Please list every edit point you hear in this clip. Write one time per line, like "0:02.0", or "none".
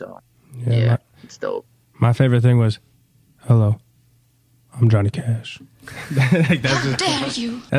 none